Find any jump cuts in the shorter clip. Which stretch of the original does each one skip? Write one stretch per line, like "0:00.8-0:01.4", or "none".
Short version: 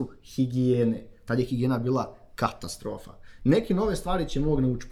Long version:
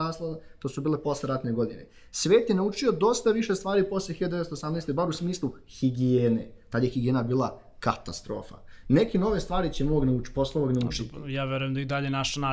none

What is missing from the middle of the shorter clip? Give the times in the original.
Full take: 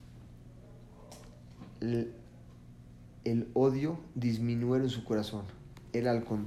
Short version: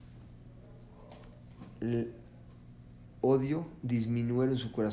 0:03.2-0:03.5

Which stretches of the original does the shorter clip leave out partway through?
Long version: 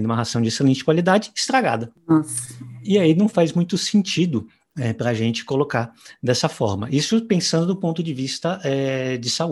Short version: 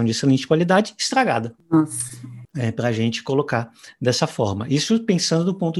0:02.8-0:04.7

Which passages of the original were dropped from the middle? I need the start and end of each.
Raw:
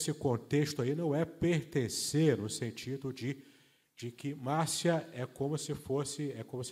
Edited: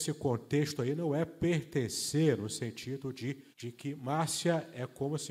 0:03.5-0:03.9

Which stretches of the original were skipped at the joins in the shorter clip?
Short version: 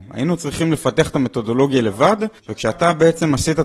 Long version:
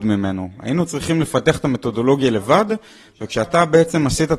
0:02.9-0:03.1

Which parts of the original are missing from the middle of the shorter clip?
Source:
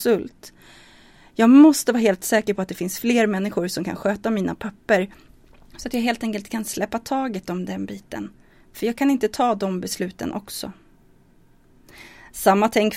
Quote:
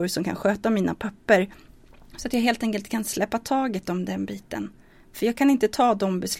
none

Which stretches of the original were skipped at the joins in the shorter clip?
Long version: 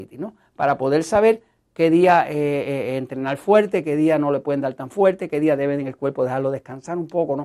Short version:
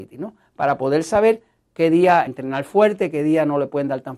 0:02.3-0:03.0

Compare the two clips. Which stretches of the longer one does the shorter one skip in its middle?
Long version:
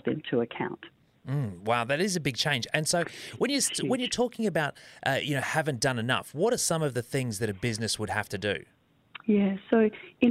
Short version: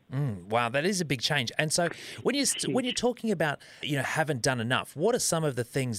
0:05.0-0:05.2

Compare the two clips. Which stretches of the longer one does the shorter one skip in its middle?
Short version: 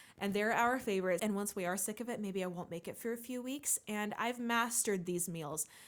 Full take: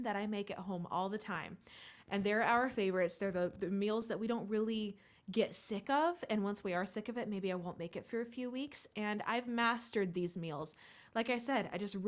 0:03.1-0:06.3

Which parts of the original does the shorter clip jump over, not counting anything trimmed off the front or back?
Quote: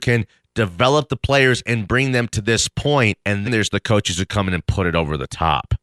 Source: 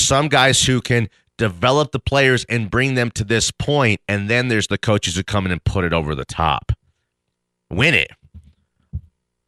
0:04.3-0:04.4

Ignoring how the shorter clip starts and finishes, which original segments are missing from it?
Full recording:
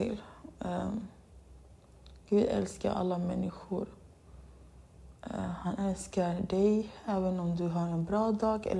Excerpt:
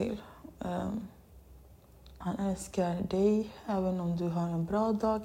0:02.2-0:05.6

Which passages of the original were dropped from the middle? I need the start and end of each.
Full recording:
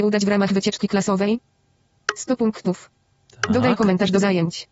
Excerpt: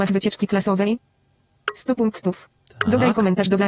0:03.0-0:03.2

